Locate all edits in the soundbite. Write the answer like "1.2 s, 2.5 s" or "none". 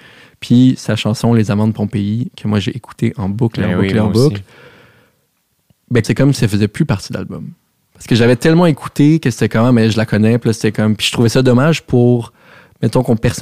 6.0 s